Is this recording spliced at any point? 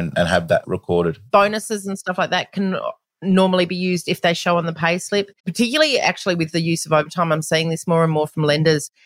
yes; 1 cut; at 5.4 s

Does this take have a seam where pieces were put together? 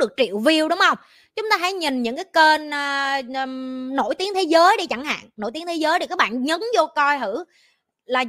no; 0 cuts

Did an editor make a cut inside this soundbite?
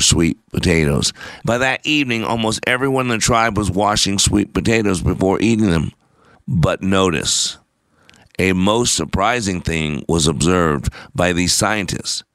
yes; 2 cuts; at 1.4 s, 6.4 s

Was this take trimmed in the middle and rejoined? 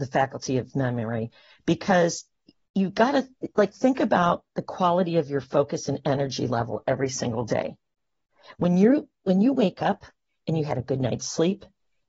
no; 0 cuts

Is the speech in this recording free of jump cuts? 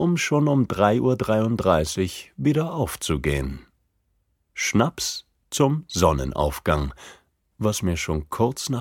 no; 1 cut; at 7.5 s

